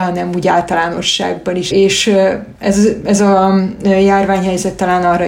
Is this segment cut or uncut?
cut